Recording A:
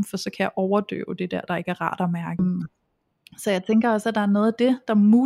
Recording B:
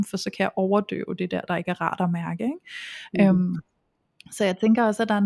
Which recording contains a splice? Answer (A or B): A